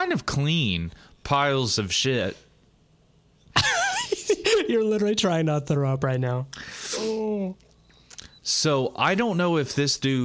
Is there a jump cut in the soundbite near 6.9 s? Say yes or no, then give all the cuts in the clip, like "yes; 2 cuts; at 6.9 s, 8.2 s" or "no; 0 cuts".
no; 0 cuts